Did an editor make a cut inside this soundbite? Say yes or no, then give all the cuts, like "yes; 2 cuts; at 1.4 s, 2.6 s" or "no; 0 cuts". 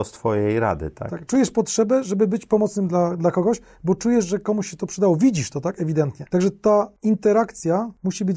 no; 0 cuts